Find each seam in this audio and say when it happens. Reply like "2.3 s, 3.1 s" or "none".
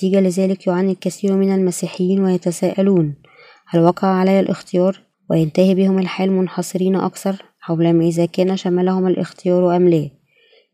5.1 s